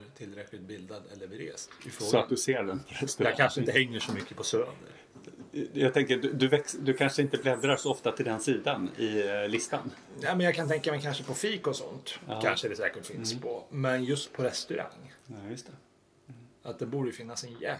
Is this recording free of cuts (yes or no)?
yes